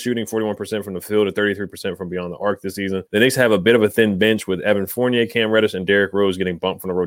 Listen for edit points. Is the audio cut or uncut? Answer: cut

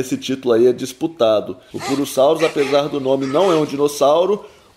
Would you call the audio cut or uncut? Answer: cut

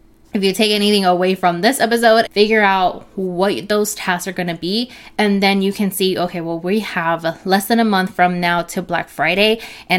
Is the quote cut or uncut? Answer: cut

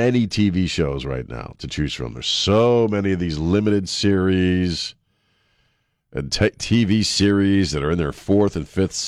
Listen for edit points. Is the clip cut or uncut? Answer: uncut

